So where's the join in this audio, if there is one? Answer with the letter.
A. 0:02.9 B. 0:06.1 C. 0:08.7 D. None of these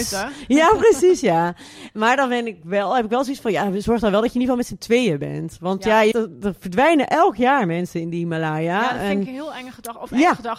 B